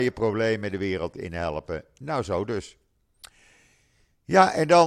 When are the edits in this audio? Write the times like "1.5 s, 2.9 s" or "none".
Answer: none